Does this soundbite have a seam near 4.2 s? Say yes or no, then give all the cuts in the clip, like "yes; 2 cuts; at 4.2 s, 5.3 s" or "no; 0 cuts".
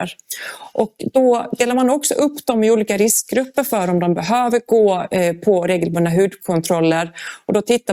no; 0 cuts